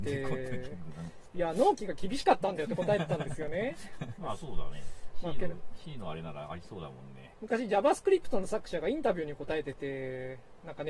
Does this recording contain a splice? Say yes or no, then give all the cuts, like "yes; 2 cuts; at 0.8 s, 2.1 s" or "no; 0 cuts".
yes; 2 cuts; at 4.2 s, 7.3 s